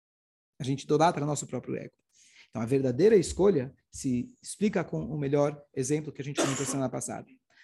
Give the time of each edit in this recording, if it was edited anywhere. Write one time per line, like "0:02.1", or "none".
none

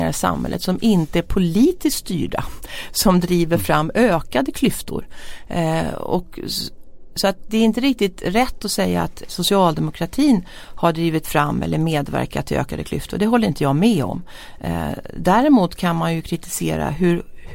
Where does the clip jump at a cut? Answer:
0:09.3

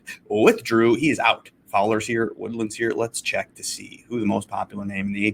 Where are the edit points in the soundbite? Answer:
none

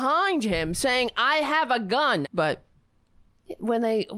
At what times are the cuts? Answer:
0:02.2

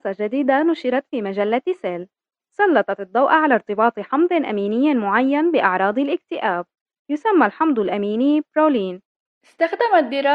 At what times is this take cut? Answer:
0:09.3

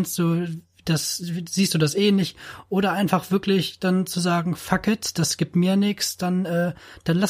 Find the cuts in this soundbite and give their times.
none

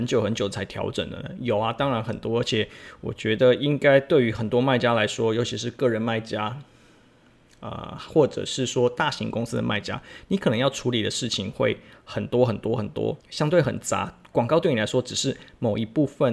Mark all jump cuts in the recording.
0:13.2

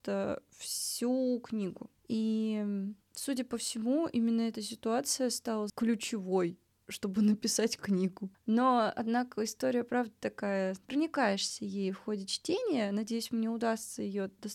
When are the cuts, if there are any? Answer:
0:02.0

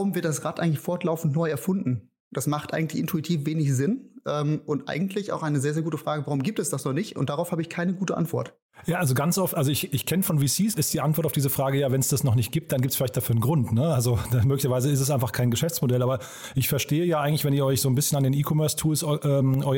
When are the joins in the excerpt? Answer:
0:10.7

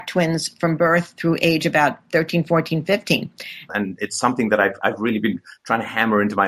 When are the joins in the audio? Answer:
0:03.7

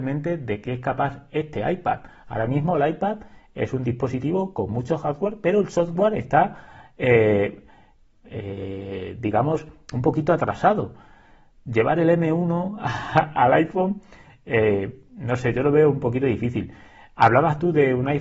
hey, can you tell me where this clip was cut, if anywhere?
none

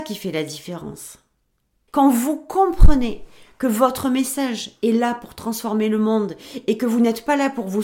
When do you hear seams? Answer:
0:01.9

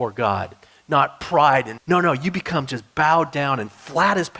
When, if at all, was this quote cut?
0:01.8

